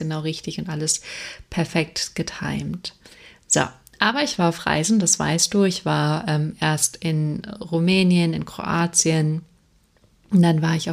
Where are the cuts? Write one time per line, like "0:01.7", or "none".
none